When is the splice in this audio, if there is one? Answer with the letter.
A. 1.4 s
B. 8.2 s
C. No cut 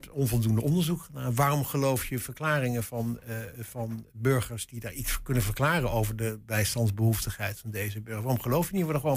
C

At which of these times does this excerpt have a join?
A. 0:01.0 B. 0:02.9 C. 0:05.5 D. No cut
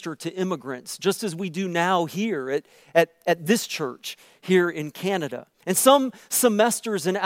C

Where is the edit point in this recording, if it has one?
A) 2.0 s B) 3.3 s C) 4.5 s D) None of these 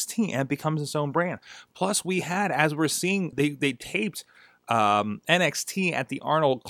B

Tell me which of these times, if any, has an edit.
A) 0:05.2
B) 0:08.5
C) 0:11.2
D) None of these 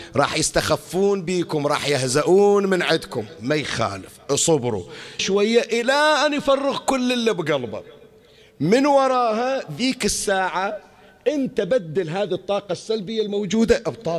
A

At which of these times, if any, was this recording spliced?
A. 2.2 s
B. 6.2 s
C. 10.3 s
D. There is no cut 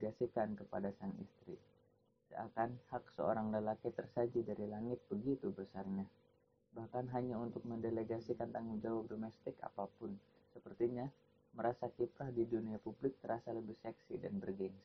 D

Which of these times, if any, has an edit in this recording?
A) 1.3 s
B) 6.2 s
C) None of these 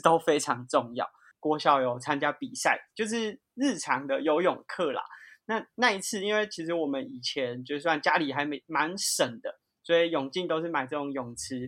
A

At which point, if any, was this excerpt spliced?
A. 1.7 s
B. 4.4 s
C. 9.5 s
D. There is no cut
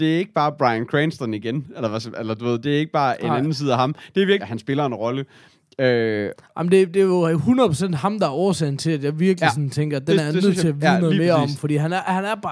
B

